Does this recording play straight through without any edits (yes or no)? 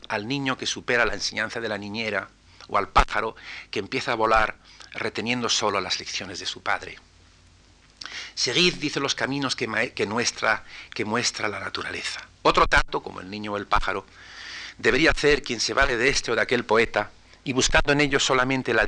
no